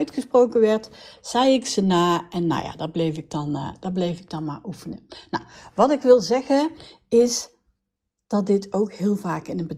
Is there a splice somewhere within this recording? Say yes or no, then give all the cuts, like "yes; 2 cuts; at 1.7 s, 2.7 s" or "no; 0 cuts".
no; 0 cuts